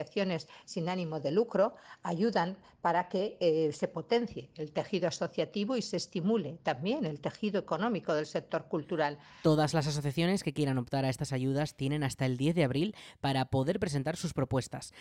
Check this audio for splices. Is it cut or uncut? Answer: uncut